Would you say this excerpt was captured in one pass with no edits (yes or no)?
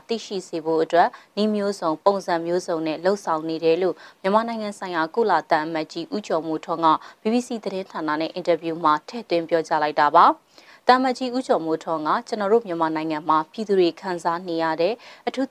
yes